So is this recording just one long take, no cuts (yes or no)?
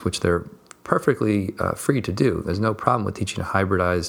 yes